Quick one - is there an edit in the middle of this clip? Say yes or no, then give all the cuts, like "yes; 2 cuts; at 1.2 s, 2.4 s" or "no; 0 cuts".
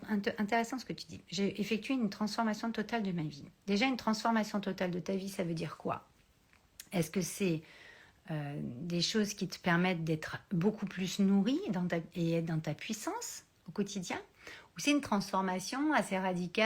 no; 0 cuts